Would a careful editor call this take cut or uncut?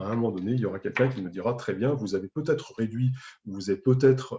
uncut